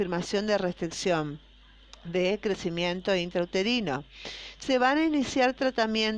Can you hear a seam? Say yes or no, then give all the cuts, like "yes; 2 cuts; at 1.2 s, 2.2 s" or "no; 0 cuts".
no; 0 cuts